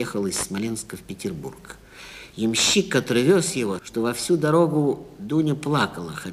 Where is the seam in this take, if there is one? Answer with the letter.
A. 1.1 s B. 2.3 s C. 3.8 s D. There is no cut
C